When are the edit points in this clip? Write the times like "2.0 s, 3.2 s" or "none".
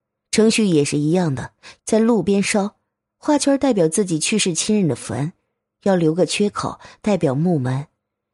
1.8 s